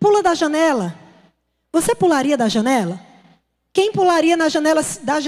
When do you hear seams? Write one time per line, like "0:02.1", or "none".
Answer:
none